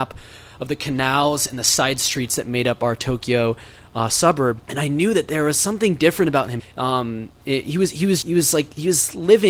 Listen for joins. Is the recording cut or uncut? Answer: cut